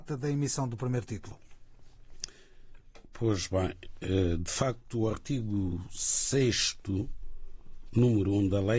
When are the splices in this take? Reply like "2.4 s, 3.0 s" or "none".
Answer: none